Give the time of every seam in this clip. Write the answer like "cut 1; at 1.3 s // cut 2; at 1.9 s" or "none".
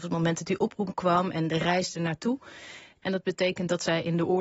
cut 1; at 3.0 s